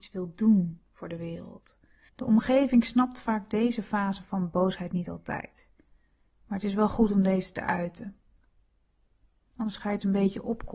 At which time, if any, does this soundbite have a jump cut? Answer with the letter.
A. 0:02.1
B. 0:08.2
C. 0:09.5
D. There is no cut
A